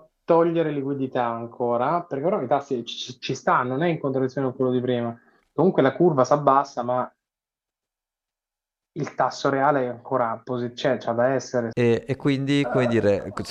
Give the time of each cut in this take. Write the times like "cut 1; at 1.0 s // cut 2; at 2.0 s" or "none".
cut 1; at 11.7 s